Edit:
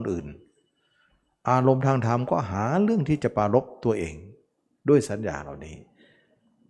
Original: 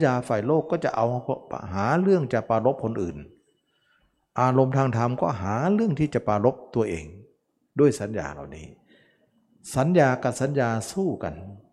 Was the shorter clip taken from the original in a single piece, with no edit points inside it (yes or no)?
yes